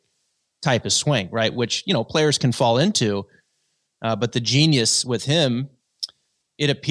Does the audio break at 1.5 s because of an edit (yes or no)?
no